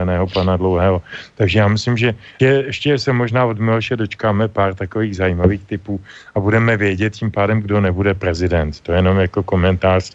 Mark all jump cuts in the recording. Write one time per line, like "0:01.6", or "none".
0:02.4